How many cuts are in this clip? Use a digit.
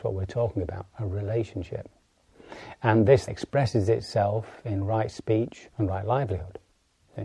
2